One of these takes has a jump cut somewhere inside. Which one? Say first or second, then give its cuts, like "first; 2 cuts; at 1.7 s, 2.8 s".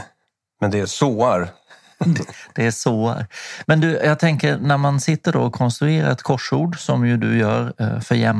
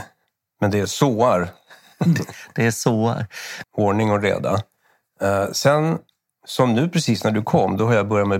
second; 1 cut; at 3.6 s